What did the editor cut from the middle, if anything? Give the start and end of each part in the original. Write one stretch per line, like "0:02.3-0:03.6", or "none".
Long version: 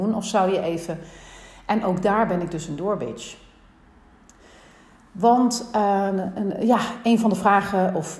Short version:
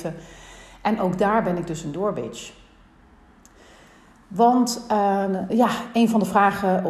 0:06.3-0:06.6

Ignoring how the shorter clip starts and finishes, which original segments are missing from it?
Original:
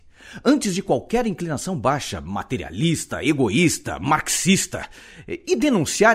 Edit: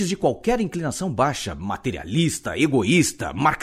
none

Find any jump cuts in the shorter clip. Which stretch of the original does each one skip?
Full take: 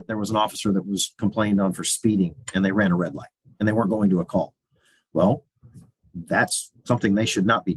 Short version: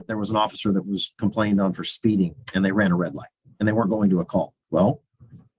0:04.6-0:05.1

